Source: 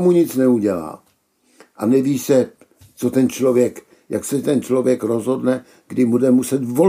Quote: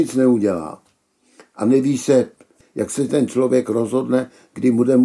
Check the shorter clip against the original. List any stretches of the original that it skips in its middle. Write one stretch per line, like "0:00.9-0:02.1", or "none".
0:02.8-0:03.9